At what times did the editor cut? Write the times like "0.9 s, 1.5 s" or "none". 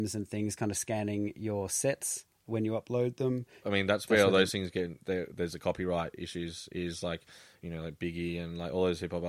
3.6 s, 7.6 s